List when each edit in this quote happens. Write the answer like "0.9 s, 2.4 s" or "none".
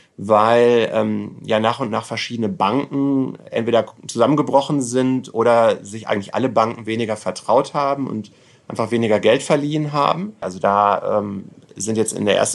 10.4 s